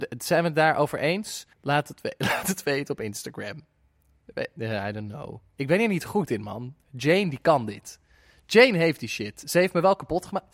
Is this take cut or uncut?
cut